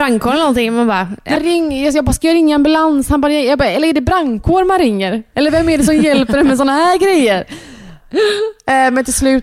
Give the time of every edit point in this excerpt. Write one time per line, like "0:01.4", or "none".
0:01.4